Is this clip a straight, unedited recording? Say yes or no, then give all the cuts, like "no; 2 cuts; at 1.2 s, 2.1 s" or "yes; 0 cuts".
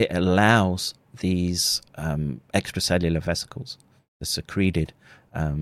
yes; 0 cuts